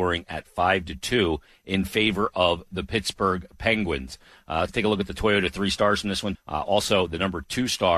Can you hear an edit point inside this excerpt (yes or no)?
yes